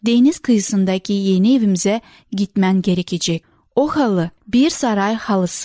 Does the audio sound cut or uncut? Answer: cut